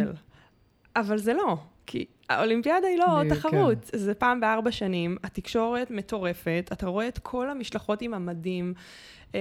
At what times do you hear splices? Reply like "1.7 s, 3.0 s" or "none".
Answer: none